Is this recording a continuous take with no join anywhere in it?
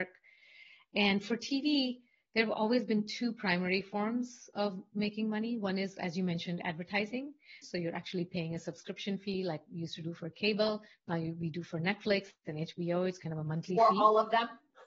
no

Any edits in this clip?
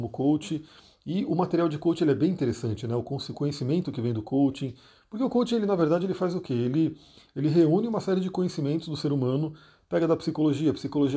no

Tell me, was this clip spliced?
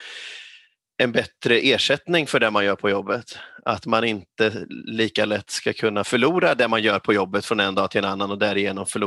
no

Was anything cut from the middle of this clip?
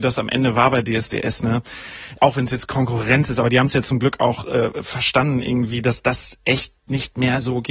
no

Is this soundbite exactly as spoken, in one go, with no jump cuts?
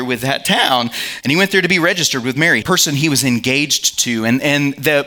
no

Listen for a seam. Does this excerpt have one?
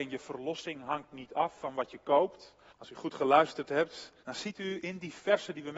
yes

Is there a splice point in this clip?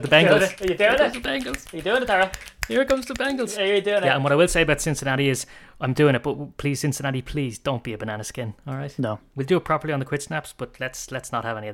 no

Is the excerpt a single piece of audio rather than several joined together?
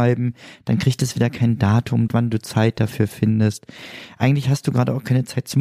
no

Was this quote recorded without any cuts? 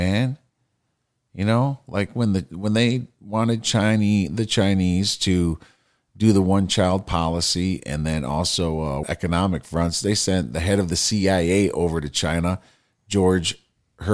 no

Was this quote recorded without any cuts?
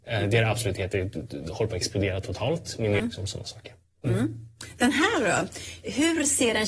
no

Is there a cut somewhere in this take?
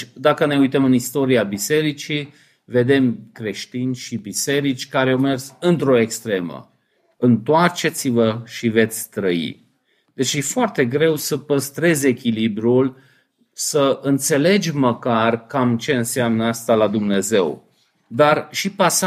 yes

